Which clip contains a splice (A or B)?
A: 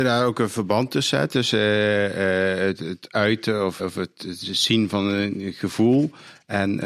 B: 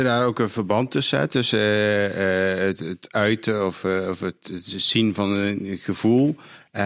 A